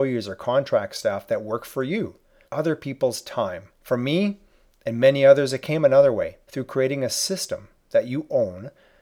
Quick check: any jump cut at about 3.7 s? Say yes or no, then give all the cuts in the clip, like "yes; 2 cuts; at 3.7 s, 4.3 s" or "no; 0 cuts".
yes; 3 cuts; at 2.4 s, 3.7 s, 6.4 s